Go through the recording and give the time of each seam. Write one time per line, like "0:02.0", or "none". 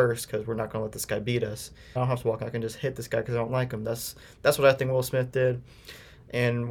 0:02.0